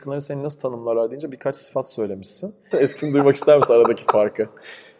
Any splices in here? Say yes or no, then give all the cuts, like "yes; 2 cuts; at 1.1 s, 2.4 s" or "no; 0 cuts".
yes; 1 cut; at 2.7 s